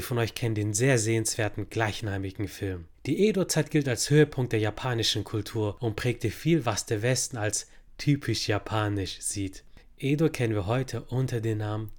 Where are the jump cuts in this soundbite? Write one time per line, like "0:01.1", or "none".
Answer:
0:02.9
0:09.8